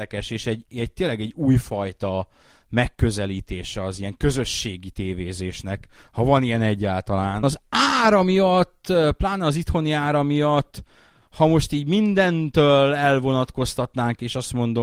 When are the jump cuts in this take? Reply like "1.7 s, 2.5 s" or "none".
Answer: 7.4 s